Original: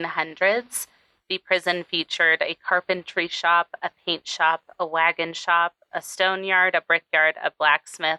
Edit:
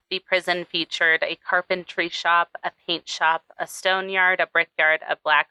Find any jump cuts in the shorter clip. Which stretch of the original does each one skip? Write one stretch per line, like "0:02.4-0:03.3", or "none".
0:04.7-0:05.8